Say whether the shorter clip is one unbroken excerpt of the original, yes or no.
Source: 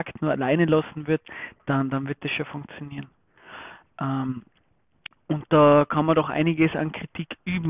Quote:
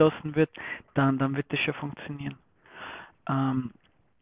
yes